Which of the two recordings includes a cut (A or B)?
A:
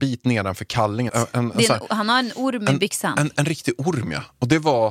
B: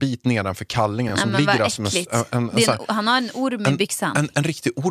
A